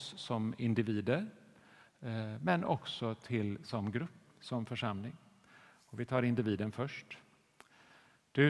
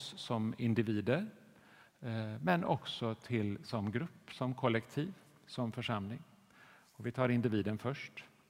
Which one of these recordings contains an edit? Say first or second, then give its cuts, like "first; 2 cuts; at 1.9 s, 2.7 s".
first; 1 cut; at 4.3 s